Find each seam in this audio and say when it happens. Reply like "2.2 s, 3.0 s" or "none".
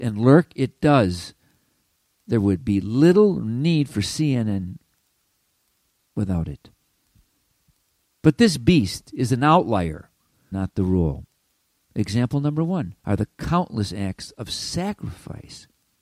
10.5 s, 13.0 s